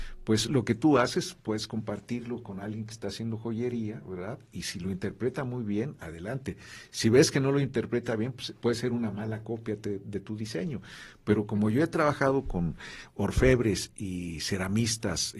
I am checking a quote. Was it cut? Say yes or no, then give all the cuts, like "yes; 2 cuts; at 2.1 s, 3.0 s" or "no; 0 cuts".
no; 0 cuts